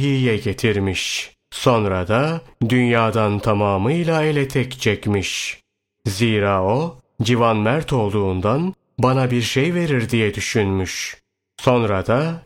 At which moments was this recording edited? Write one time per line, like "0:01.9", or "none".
0:01.4
0:06.0